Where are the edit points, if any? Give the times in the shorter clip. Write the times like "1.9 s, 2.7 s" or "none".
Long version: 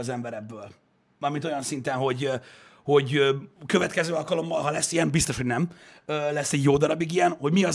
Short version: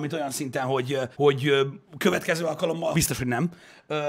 1.1 s, 2.9 s